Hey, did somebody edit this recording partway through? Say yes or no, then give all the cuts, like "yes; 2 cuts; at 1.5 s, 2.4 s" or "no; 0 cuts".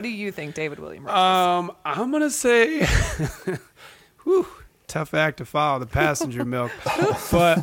no; 0 cuts